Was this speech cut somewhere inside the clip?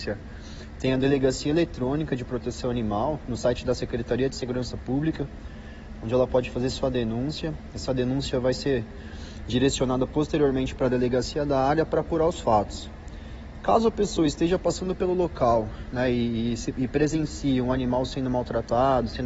no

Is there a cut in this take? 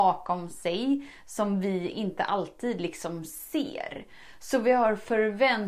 no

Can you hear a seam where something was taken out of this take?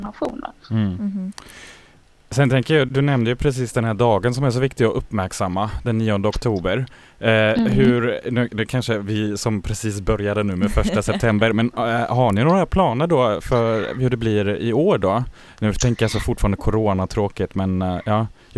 yes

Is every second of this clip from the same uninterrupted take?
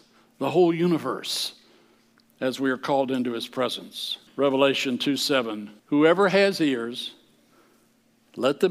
no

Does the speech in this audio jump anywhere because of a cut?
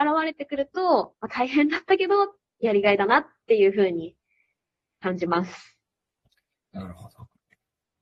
no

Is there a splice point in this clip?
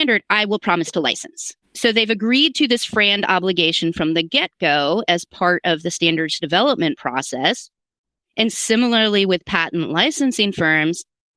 yes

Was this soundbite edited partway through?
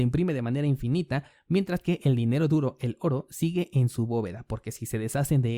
no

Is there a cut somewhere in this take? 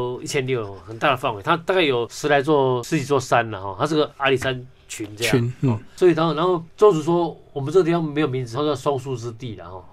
yes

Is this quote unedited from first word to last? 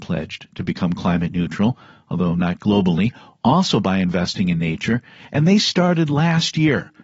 yes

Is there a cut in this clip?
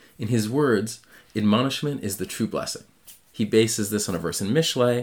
no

